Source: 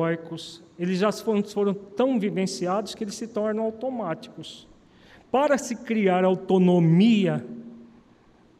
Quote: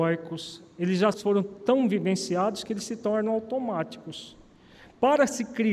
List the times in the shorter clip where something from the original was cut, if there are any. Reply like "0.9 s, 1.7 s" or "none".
1.1 s